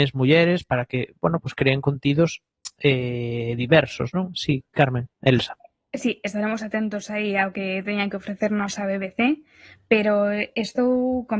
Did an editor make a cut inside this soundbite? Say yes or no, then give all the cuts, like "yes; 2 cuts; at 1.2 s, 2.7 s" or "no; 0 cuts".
no; 0 cuts